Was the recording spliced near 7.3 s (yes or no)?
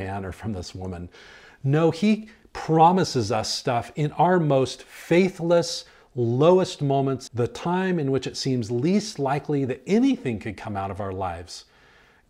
yes